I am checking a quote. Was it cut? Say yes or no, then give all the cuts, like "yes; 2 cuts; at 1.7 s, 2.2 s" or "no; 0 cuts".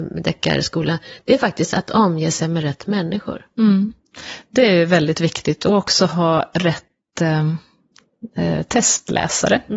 no; 0 cuts